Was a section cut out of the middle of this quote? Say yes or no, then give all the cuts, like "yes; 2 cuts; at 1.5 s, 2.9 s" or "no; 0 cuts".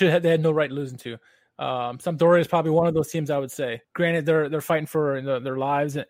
yes; 1 cut; at 3.8 s